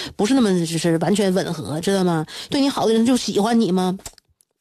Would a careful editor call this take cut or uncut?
cut